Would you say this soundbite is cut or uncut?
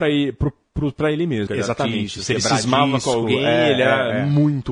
cut